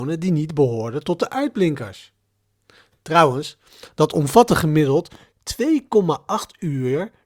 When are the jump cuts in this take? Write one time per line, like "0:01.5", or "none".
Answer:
none